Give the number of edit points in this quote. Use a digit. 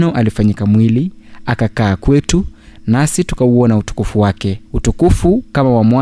1